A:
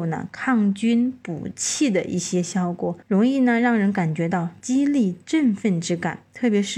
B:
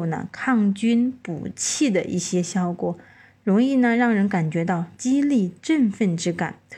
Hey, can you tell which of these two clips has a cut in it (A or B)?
A